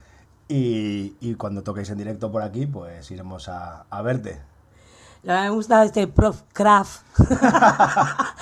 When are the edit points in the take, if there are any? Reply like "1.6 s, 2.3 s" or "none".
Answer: none